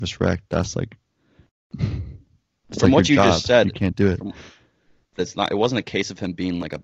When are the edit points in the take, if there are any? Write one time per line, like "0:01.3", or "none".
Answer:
0:05.2